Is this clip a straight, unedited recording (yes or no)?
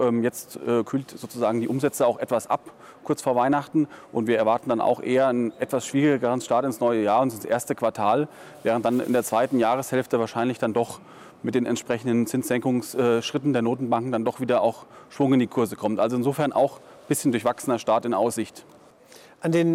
yes